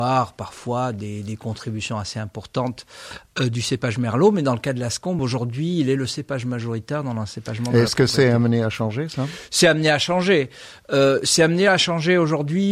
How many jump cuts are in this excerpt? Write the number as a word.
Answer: zero